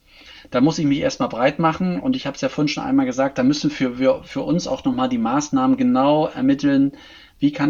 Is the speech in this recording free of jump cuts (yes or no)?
yes